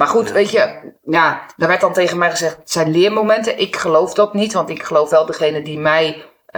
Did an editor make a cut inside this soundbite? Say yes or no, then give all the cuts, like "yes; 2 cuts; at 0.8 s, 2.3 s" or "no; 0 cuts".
no; 0 cuts